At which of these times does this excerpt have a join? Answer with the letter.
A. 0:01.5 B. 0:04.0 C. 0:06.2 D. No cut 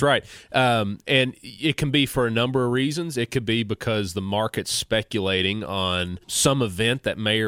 C